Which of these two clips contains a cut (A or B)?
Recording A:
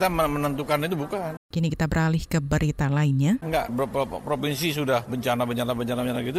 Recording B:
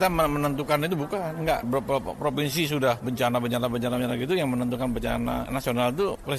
A